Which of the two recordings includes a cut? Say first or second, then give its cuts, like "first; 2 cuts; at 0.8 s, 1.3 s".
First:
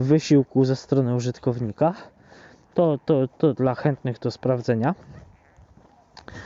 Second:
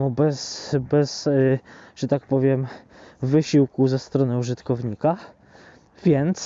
first; 1 cut; at 2.7 s